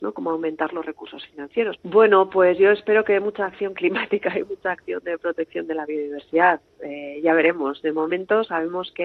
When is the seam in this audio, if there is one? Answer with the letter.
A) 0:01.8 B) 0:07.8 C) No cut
A